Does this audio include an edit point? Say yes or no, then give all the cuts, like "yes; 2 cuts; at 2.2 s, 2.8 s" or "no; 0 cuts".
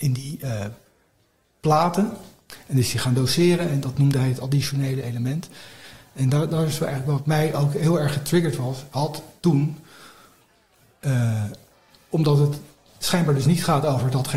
no; 0 cuts